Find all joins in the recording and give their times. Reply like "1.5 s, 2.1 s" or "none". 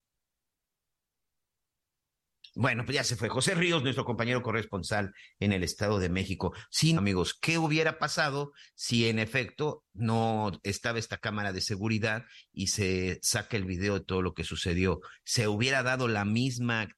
7.0 s, 15.2 s